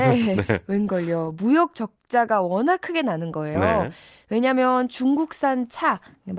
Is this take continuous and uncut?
yes; 0 cuts

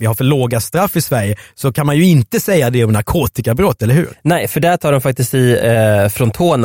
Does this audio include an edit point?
no; 0 cuts

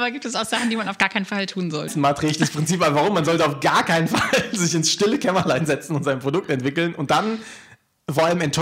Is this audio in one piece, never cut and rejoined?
no; 1 cut; at 1.9 s

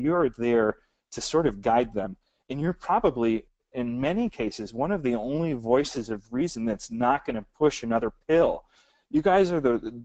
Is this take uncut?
yes; 0 cuts

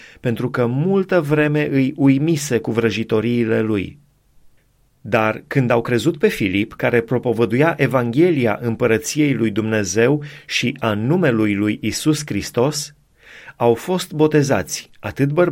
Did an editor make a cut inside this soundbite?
no; 0 cuts

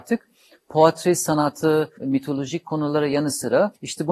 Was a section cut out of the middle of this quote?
yes; 1 cut; at 2.0 s

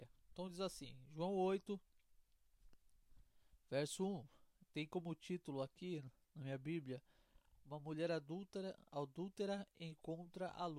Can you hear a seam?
no; 0 cuts

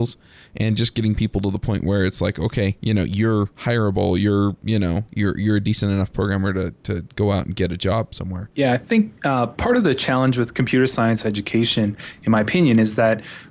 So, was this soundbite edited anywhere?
no; 0 cuts

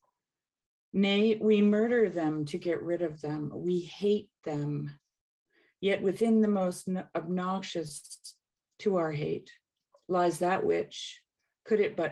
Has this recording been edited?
no; 0 cuts

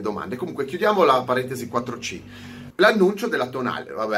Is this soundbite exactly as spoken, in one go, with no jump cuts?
no; 1 cut; at 2.7 s

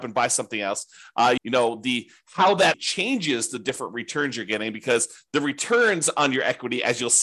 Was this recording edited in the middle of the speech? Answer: yes; 2 cuts; at 1.4 s, 2.7 s

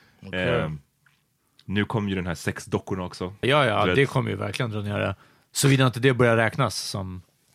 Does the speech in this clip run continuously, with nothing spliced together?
no; 1 cut; at 3.4 s

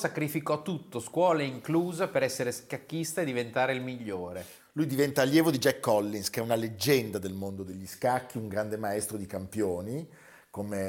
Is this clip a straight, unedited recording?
yes; 0 cuts

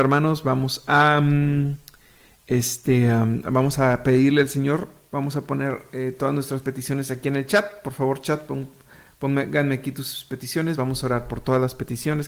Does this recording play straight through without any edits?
yes; 0 cuts

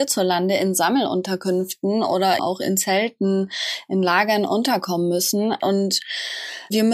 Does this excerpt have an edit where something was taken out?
yes; 2 cuts; at 2.4 s, 5.6 s

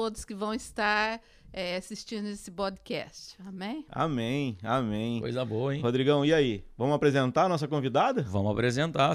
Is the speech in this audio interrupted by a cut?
no; 0 cuts

